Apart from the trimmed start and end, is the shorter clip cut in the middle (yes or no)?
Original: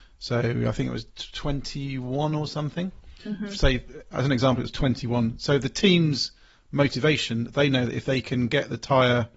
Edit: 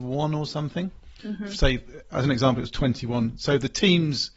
no